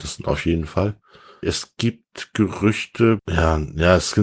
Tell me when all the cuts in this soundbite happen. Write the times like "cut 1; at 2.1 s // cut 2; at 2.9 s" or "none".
cut 1; at 1.4 s // cut 2; at 3.2 s